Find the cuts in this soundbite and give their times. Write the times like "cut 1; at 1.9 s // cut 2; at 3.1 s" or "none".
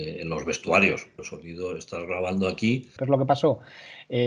cut 1; at 1.2 s // cut 2; at 3.0 s